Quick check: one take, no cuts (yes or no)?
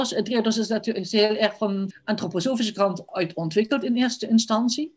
no